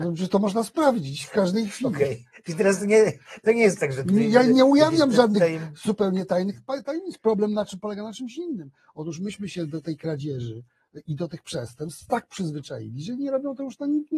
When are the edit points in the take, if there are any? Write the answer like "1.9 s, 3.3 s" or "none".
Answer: none